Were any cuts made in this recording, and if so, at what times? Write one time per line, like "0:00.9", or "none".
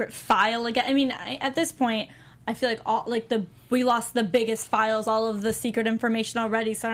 none